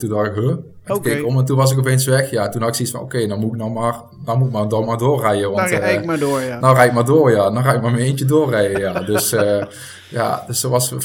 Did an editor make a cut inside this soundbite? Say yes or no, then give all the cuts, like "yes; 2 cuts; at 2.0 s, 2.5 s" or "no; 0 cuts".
no; 0 cuts